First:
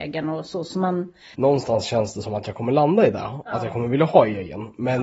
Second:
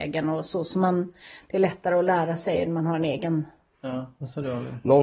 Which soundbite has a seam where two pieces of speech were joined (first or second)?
first